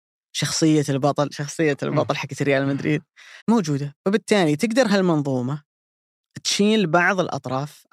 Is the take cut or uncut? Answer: cut